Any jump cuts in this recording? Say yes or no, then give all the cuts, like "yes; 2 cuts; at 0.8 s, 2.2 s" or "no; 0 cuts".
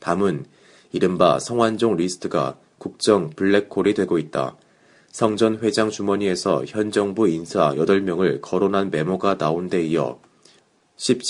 no; 0 cuts